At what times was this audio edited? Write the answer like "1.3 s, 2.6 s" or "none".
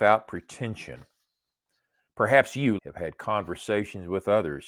2.8 s